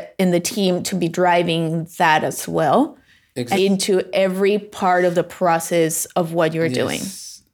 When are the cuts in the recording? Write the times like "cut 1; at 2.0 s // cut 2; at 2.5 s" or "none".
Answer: cut 1; at 3.5 s